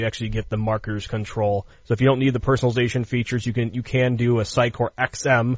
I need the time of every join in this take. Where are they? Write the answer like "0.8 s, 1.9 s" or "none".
1.7 s